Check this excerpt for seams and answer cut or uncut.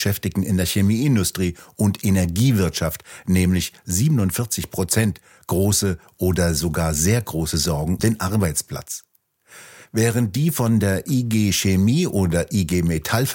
cut